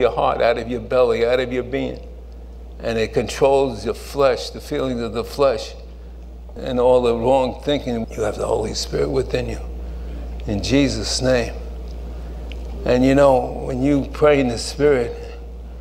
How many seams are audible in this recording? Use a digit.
2